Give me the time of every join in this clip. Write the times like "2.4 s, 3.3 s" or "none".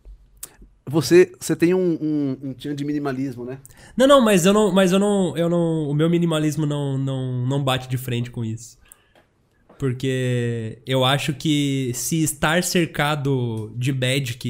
none